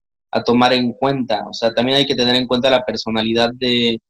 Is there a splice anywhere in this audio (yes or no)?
no